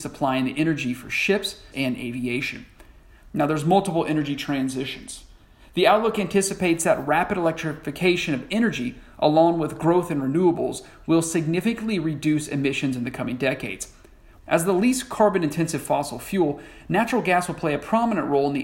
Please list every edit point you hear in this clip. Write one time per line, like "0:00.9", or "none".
0:01.7
0:03.3
0:14.4